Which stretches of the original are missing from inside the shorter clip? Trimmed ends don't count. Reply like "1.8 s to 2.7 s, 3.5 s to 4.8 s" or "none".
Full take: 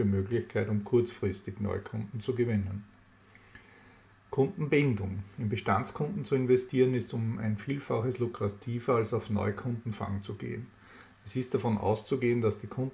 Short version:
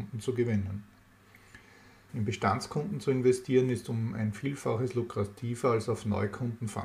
4.1 s to 5.3 s